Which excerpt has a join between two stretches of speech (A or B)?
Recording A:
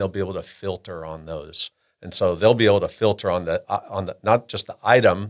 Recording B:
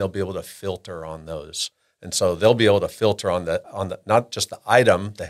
B